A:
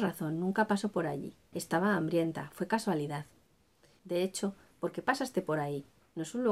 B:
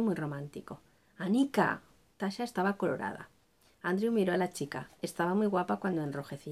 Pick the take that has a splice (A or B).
A